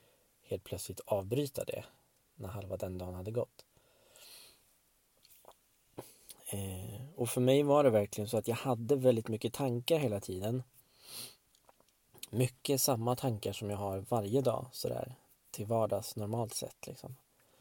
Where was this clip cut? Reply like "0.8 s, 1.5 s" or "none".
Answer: none